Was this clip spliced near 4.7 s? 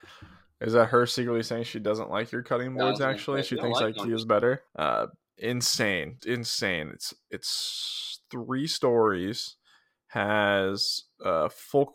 yes; 2 cuts; at 4.7 s, 6.2 s

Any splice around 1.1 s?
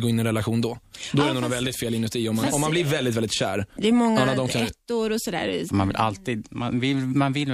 no; 2 cuts; at 3.8 s, 5.7 s

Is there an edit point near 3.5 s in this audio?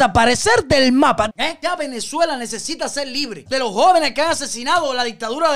yes; 2 cuts; at 1.3 s, 3.5 s

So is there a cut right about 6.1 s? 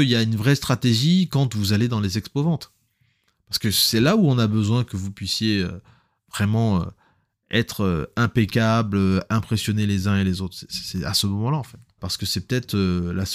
no; 1 cut; at 12.0 s

